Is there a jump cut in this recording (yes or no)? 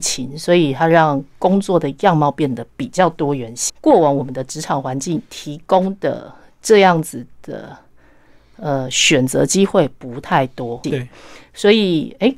yes